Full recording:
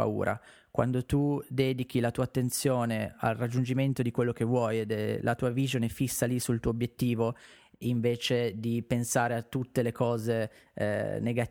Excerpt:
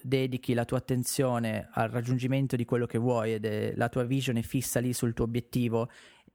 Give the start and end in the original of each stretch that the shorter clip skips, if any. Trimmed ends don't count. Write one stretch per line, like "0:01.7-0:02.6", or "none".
none